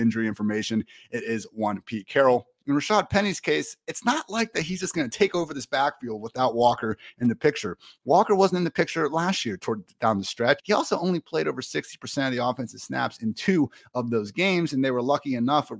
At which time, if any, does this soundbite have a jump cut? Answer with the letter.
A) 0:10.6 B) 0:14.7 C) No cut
A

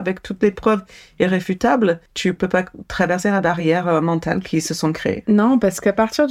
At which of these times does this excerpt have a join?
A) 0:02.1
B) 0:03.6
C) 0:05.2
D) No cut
A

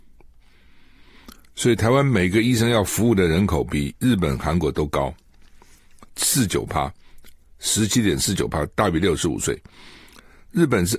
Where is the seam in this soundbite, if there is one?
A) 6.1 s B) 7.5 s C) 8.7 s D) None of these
A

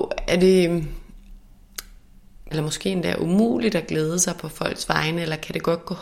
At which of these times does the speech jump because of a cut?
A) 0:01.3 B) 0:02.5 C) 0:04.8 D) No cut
B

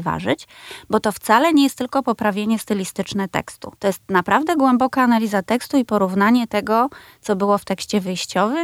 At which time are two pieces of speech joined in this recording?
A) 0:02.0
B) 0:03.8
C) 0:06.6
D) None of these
B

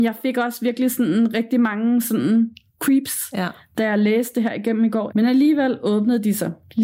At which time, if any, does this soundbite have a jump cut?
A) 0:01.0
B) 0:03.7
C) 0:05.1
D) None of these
C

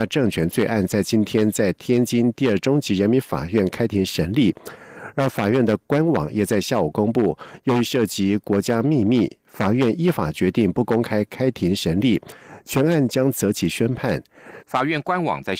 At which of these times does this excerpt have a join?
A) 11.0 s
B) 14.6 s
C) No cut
B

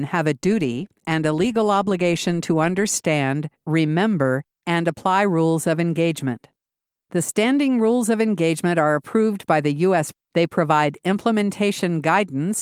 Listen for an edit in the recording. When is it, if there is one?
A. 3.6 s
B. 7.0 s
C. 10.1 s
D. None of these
C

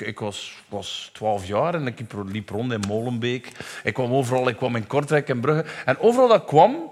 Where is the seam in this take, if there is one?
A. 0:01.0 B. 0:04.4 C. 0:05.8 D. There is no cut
D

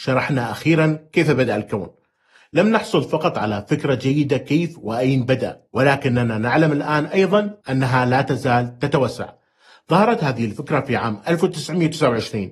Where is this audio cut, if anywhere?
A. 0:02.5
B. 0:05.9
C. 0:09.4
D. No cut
D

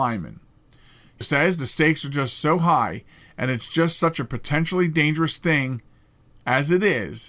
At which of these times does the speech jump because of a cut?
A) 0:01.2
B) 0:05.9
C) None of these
A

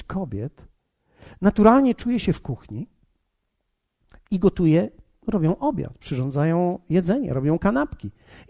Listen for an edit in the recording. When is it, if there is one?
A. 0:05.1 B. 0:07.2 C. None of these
C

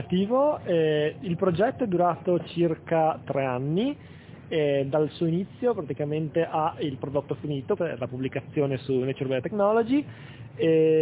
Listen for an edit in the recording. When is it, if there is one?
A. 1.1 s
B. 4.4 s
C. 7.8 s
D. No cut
C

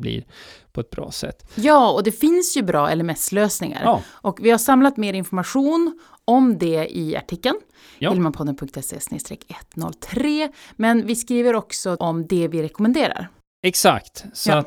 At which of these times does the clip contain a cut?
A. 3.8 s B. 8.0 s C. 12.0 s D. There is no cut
C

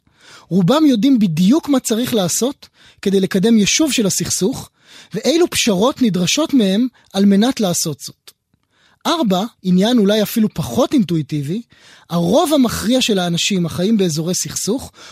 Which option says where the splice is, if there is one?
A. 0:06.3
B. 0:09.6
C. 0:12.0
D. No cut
B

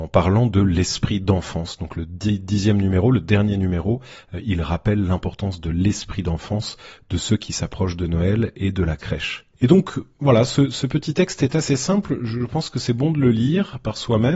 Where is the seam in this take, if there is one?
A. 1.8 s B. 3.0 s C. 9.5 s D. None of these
C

